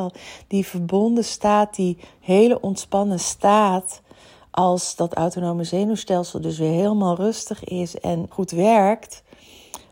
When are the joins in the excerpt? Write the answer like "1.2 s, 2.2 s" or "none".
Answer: 8.3 s